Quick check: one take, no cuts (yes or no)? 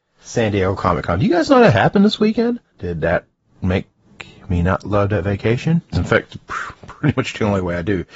no